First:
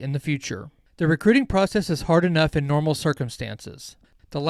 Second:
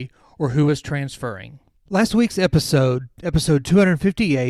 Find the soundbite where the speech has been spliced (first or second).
second